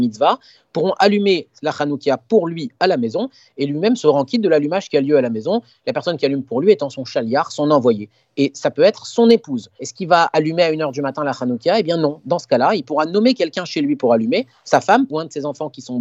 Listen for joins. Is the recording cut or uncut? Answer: cut